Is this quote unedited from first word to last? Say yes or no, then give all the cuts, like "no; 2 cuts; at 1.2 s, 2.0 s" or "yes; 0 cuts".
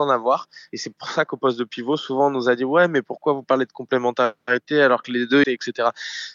no; 1 cut; at 5.4 s